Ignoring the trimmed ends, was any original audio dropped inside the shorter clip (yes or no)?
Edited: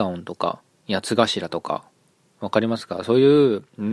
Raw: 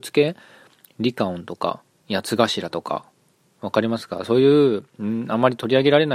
no